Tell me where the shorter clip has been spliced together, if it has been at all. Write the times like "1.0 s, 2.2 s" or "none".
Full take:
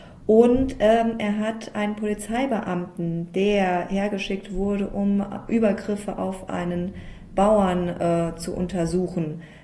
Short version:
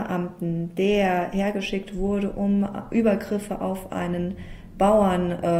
none

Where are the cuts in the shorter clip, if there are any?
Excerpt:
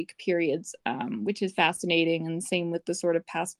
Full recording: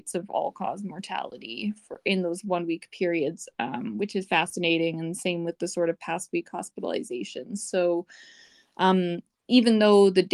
none

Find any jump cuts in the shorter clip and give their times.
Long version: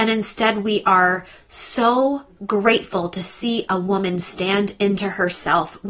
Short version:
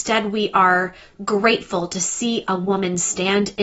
1.1 s

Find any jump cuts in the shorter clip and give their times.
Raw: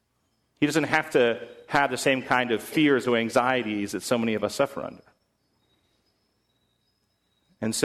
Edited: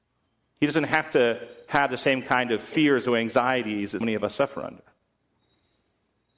4.0 s

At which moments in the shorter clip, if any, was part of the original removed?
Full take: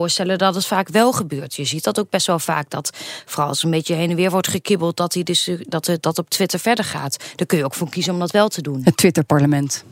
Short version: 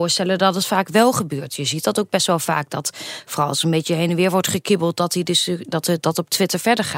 none

